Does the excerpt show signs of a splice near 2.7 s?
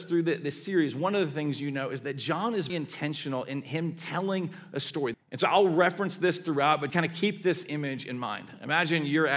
yes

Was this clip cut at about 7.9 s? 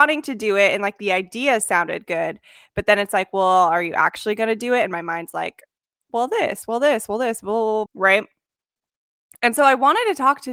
yes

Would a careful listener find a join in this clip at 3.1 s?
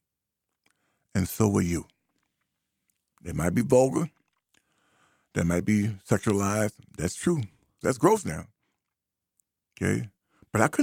yes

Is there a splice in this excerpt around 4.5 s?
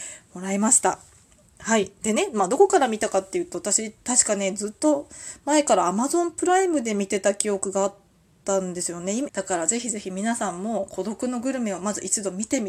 no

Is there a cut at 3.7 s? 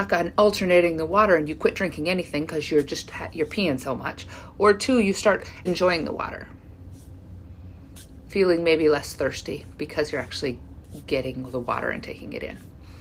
no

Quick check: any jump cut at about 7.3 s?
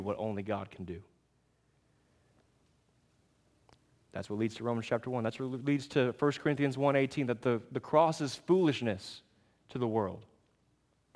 no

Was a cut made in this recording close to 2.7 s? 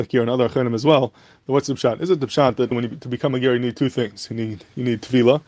yes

